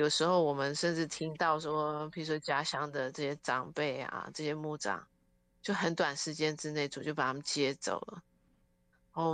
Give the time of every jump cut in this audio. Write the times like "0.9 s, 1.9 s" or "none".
none